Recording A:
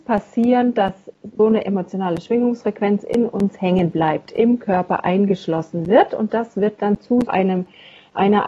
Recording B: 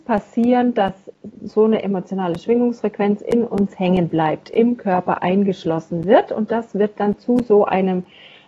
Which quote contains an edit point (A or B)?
A